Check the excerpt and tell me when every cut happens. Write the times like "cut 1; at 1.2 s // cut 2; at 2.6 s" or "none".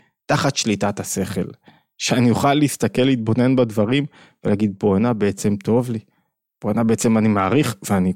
none